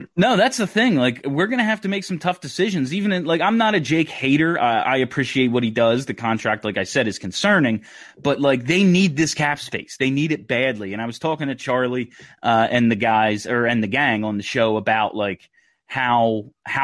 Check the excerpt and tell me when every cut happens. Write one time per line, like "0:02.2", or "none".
none